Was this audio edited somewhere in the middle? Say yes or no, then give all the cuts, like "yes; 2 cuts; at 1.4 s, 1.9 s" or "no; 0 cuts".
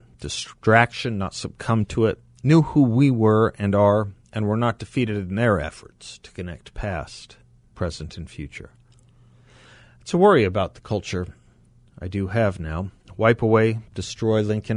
no; 0 cuts